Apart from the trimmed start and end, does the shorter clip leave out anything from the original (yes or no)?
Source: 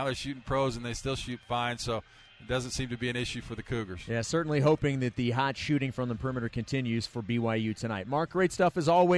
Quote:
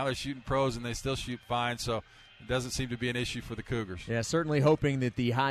no